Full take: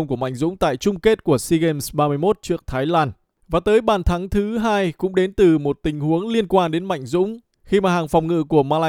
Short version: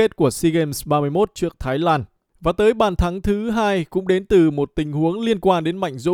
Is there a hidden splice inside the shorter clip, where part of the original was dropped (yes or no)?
no